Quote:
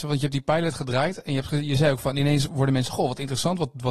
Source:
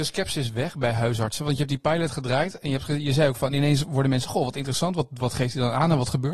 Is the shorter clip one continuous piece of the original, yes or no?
yes